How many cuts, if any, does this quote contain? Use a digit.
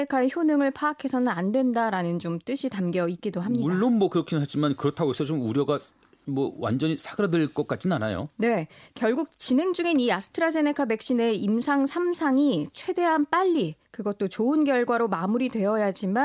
0